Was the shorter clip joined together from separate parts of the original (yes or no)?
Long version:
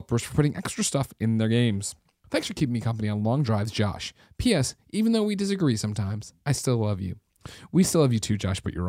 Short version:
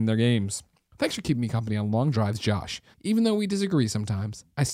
yes